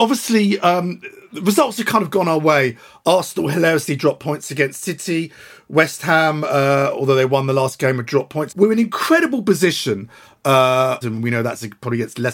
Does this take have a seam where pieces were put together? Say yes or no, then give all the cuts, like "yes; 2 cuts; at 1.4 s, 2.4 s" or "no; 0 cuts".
yes; 2 cuts; at 8.5 s, 11.0 s